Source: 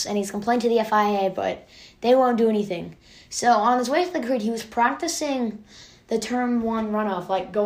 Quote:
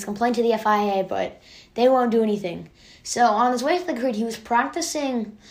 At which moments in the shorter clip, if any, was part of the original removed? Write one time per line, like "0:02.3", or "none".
none